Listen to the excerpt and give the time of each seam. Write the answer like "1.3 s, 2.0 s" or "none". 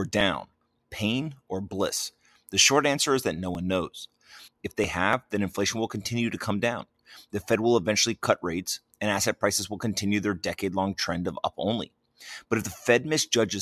4.5 s